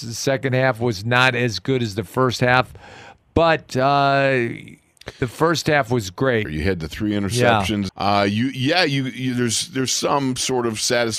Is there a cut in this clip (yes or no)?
yes